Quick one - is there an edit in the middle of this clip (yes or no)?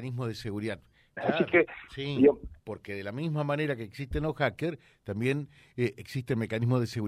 yes